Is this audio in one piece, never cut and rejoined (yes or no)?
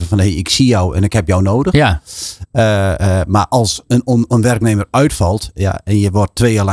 yes